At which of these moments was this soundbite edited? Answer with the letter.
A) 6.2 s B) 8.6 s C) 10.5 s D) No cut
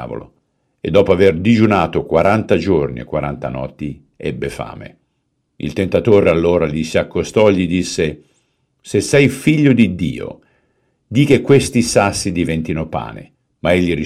D